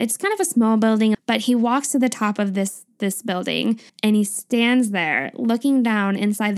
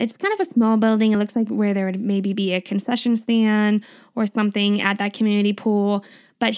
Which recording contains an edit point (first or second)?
first